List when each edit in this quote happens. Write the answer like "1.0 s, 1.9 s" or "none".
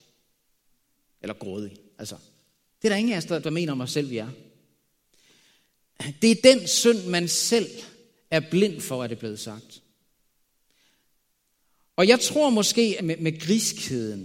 3.4 s, 13.0 s